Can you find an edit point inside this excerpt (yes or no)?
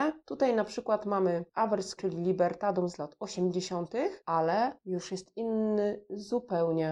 yes